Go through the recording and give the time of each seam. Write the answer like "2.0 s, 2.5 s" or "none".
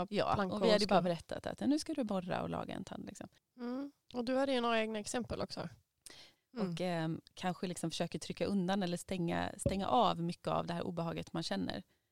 3.4 s, 6.4 s